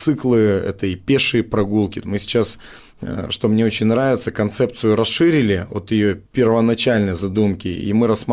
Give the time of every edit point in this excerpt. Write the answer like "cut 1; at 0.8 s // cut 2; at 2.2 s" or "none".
cut 1; at 2.0 s